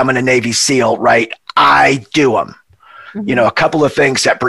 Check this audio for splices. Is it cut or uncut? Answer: uncut